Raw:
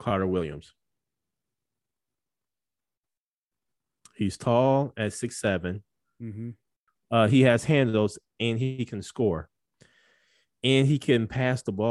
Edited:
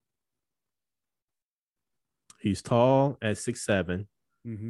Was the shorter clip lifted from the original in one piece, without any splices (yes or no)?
yes